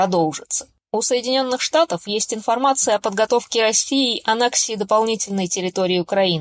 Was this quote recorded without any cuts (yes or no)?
yes